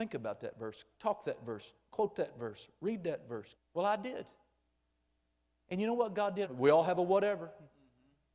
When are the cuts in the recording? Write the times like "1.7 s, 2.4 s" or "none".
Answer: 3.6 s, 6.4 s